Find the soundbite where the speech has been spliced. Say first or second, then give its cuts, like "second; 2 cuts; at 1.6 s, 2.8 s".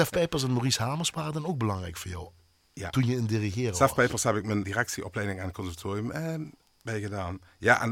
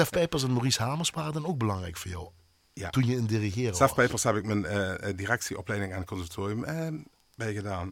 first; 1 cut; at 4.6 s